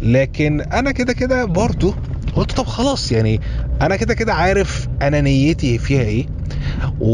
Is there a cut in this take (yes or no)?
no